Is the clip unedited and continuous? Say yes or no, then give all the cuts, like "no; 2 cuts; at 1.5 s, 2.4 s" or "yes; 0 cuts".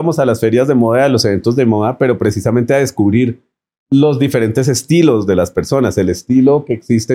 yes; 0 cuts